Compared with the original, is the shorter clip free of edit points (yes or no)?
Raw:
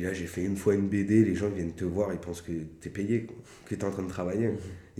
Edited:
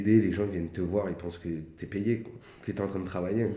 yes